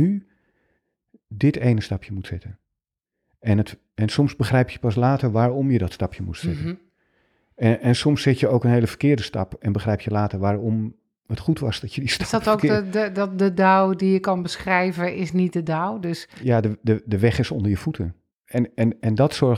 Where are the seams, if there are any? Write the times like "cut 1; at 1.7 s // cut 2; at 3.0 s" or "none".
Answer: none